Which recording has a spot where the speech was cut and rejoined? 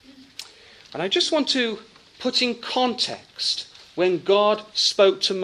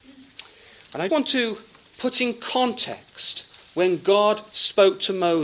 second; 1 cut; at 1.1 s

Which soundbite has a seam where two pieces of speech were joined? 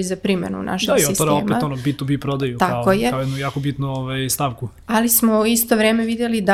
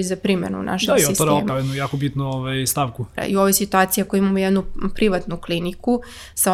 second; 2 cuts; at 1.5 s, 3.2 s

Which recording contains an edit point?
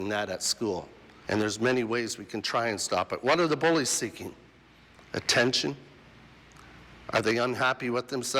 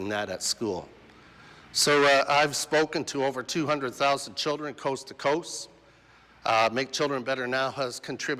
first; 1 cut; at 1.2 s

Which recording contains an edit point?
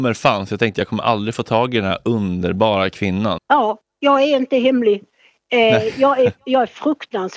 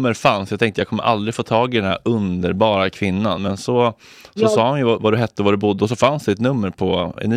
first; 1 cut; at 3.4 s

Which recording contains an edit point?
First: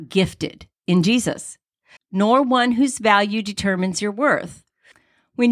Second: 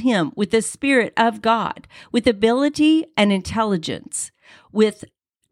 first; 1 cut; at 2.0 s

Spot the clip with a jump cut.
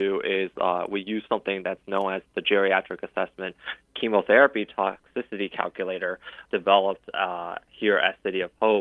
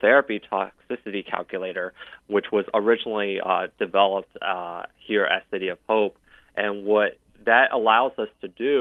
first; 1 cut; at 6.5 s

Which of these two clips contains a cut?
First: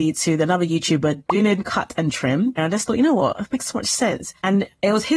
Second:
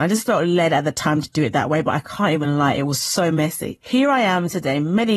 first; 1 cut; at 2.6 s

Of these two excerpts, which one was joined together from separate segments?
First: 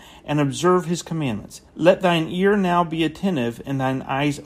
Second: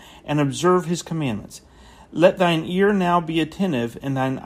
first; 1 cut; at 1.7 s

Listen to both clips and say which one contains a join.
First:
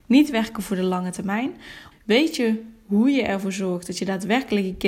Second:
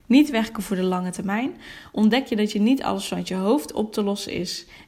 first; 1 cut; at 1.9 s

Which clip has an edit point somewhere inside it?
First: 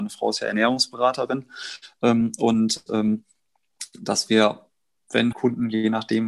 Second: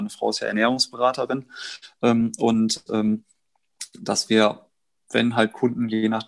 first; 1 cut; at 5.3 s

